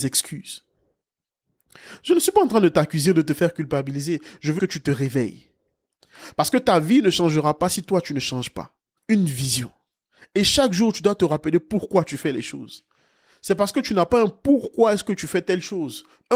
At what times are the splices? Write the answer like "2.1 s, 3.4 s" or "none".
4.6 s, 9.0 s